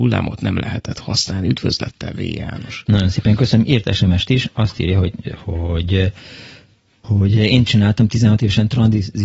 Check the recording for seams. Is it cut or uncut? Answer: uncut